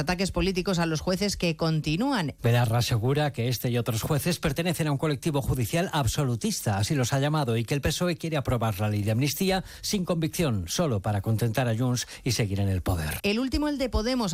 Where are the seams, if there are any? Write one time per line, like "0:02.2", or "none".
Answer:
0:02.4
0:13.2